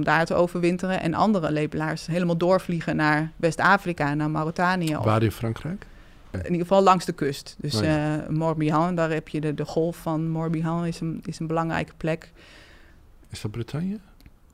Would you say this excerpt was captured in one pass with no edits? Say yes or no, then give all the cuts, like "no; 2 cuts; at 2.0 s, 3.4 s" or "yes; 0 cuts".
yes; 0 cuts